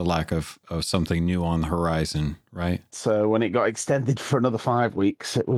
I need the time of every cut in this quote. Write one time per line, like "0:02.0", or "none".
0:02.9